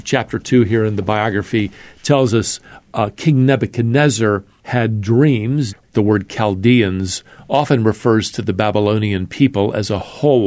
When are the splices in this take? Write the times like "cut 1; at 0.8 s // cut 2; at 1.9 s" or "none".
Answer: cut 1; at 5.7 s